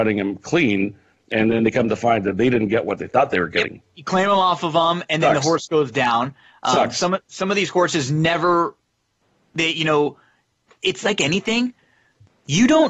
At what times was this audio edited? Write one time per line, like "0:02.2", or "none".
none